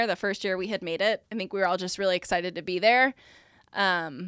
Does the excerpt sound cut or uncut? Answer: cut